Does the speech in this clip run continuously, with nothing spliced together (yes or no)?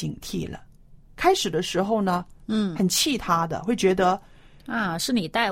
no